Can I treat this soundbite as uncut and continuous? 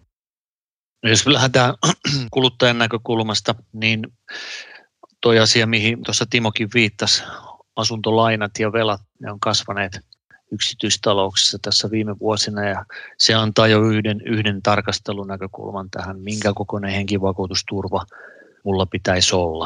yes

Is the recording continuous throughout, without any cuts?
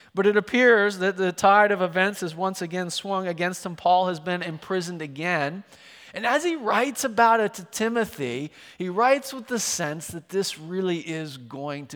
yes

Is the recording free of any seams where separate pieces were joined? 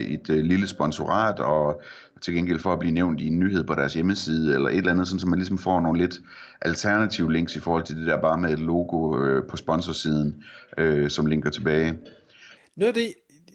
no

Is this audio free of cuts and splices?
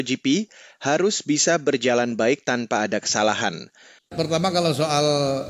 no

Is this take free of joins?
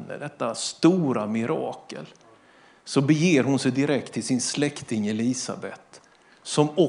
yes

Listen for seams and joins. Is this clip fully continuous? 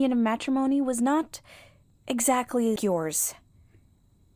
no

